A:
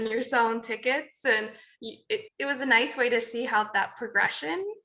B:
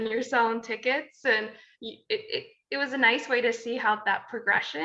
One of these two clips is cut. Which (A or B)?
A